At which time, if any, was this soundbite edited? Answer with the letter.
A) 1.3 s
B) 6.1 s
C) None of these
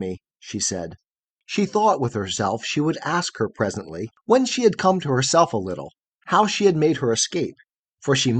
C